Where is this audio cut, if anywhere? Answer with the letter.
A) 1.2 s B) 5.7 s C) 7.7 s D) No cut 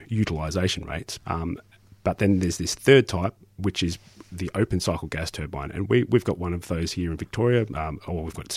A